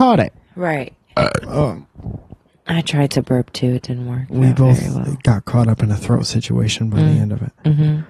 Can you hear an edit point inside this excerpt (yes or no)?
yes